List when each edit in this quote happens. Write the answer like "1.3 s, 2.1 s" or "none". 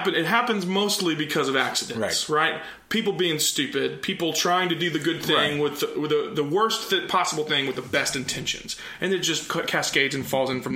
none